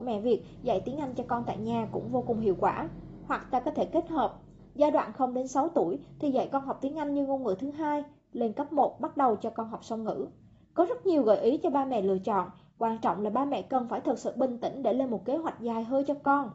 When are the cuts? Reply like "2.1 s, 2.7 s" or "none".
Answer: none